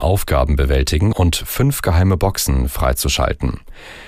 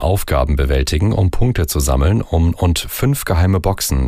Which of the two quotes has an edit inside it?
first; 1 cut; at 1.1 s

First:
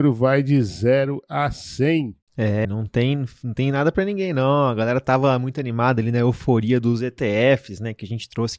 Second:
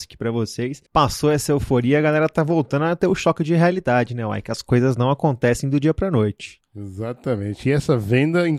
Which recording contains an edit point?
first; 1 cut; at 2.6 s

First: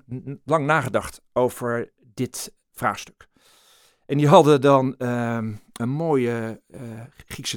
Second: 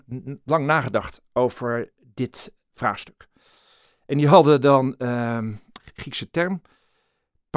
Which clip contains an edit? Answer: second; 1 cut; at 5.8 s

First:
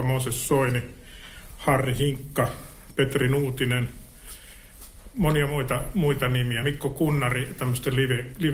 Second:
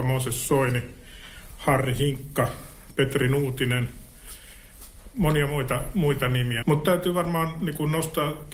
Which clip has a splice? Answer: second; 1 cut; at 6.6 s

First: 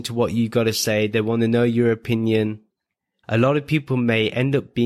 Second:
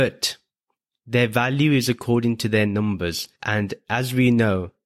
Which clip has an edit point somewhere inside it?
first; 1 cut; at 3.2 s

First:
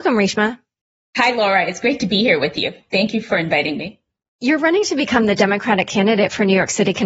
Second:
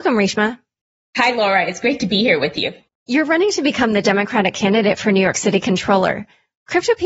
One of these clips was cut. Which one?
second; 1 cut; at 2.9 s

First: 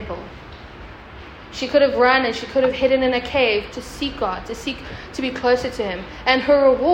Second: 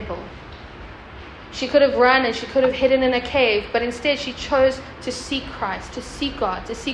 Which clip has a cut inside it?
first; 1 cut; at 3.7 s

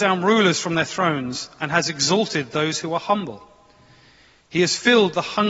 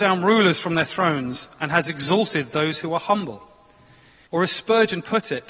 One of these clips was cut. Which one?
second; 1 cut; at 4.3 s

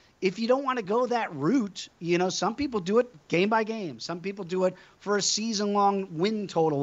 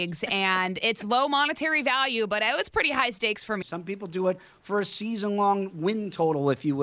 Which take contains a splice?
second; 1 cut; at 3.6 s

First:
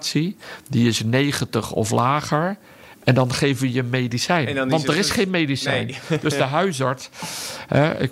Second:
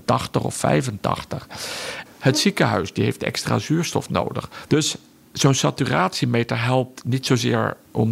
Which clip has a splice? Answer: second; 2 cuts; at 2.1 s, 4.7 s

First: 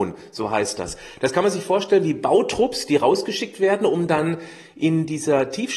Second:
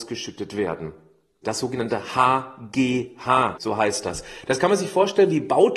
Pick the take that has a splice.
second; 2 cuts; at 1.4 s, 3.6 s

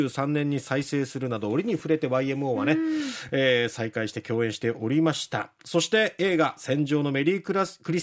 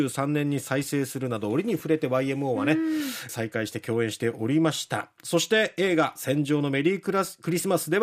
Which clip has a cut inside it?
second; 1 cut; at 3.3 s

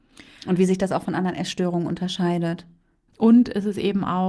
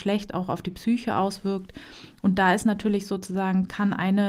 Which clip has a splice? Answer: first; 1 cut; at 3.1 s

